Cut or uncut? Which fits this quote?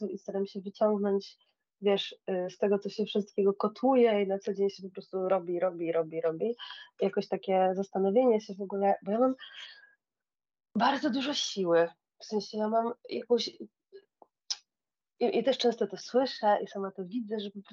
uncut